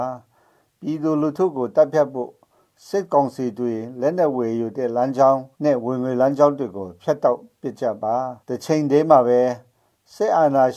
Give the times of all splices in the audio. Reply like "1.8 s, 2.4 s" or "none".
5.5 s, 8.4 s